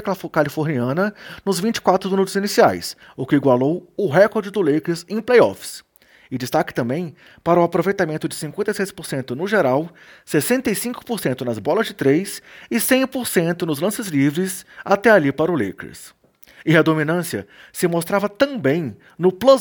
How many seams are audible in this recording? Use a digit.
0